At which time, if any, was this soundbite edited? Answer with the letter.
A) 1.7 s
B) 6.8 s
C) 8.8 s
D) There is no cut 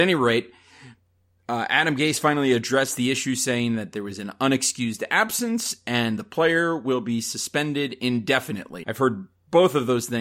C